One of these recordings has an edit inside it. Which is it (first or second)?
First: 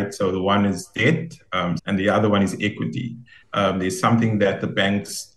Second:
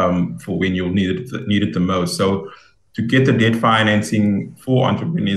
first